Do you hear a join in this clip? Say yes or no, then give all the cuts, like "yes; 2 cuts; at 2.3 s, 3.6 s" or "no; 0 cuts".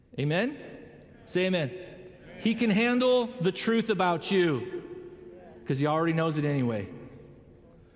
no; 0 cuts